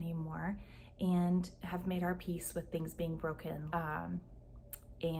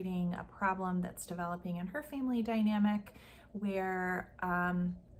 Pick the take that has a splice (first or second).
first